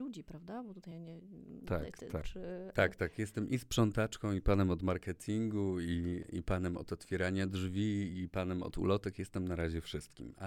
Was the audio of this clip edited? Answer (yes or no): yes